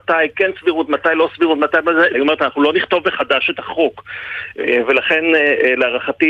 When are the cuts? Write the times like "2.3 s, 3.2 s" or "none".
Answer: 2.1 s